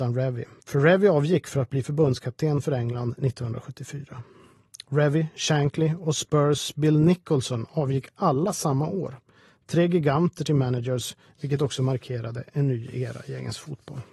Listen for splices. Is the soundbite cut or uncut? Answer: uncut